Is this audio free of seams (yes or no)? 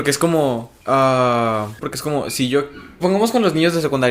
no